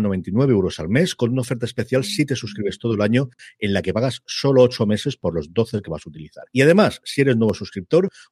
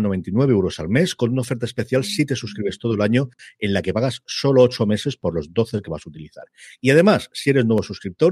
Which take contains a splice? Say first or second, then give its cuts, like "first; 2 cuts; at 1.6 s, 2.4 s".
first; 1 cut; at 6.5 s